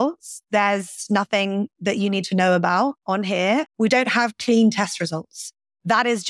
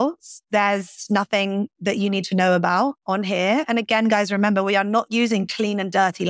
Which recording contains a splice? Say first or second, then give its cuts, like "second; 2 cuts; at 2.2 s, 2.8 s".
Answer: first; 1 cut; at 3.7 s